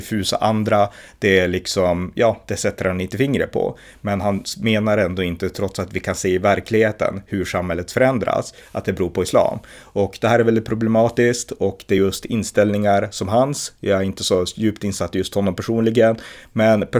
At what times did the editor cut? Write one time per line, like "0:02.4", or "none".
none